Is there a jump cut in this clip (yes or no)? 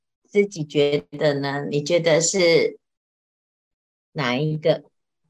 no